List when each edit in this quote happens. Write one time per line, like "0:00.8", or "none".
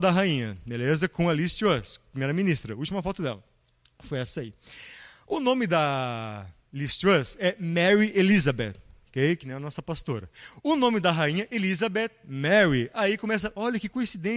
none

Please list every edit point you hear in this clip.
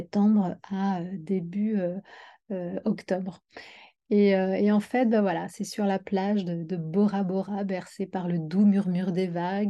none

